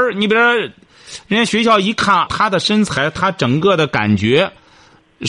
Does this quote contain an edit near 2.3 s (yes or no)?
yes